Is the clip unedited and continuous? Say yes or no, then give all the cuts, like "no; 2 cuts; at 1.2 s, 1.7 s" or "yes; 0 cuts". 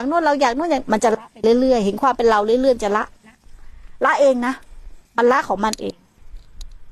no; 1 cut; at 5.1 s